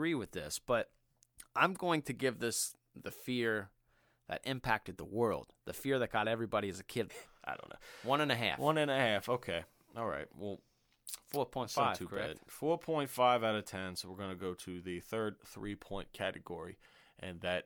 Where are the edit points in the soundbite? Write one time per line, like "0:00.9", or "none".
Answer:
0:07.1